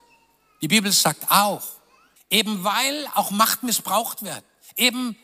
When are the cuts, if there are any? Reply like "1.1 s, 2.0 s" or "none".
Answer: 2.2 s